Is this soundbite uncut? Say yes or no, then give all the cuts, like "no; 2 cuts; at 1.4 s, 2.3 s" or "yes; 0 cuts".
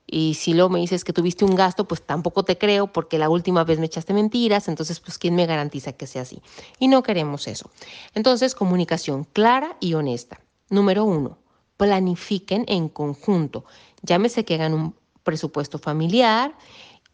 yes; 0 cuts